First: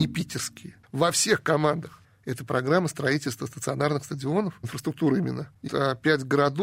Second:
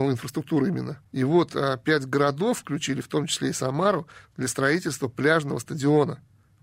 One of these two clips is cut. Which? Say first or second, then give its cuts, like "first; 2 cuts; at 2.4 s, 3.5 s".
first; 3 cuts; at 2.0 s, 4.6 s, 5.7 s